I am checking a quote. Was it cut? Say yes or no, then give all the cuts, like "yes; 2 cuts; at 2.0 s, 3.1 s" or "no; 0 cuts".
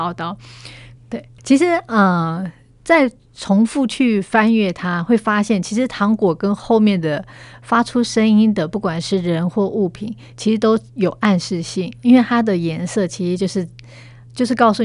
yes; 1 cut; at 0.9 s